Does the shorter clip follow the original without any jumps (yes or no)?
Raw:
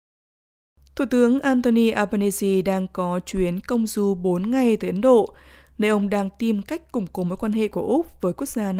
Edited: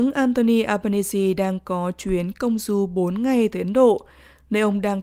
yes